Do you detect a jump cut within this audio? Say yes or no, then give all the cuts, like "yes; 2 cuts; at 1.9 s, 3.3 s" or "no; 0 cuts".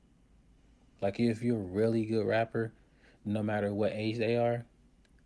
yes; 2 cuts; at 1.0 s, 3.2 s